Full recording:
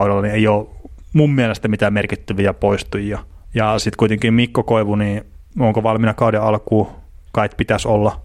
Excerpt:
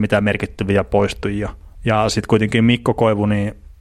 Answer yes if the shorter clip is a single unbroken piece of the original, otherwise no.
yes